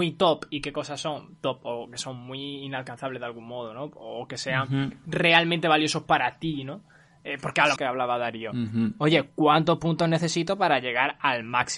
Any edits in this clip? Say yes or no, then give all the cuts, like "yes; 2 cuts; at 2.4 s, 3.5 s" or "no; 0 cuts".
yes; 1 cut; at 7.8 s